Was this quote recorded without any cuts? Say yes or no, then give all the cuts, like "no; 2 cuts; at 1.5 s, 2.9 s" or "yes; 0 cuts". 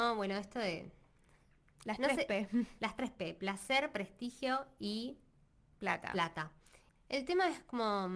yes; 0 cuts